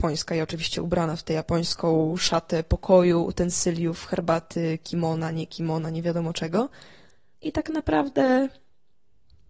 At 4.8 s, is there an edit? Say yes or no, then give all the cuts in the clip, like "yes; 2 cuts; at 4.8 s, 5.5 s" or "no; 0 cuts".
no; 1 cut; at 7.3 s